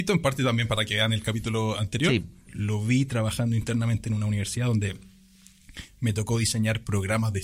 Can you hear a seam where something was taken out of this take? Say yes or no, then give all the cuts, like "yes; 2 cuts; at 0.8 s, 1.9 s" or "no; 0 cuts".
yes; 1 cut; at 2.5 s